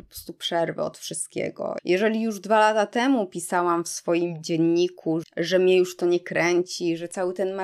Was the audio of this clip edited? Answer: yes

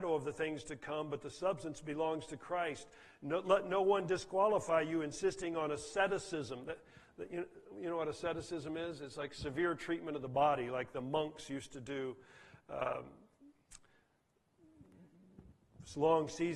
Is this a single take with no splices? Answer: yes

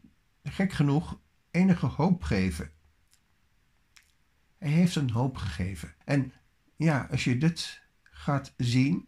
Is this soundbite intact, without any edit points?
no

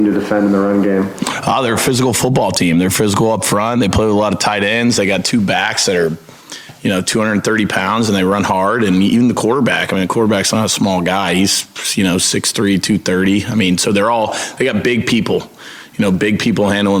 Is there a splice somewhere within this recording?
no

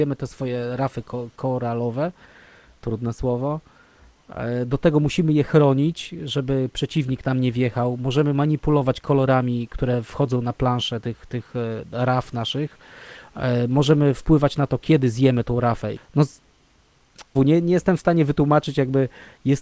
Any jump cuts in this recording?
yes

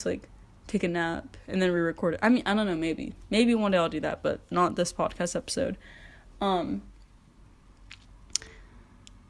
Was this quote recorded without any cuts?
yes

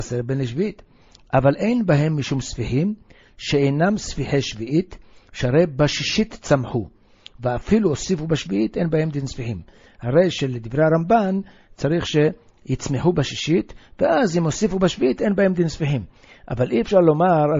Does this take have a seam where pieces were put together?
no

